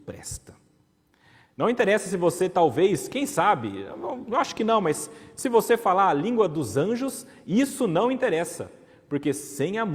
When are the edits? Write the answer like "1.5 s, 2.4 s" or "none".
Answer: none